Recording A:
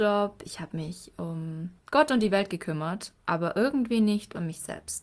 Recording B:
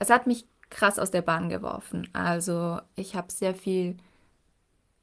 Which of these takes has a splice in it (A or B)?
A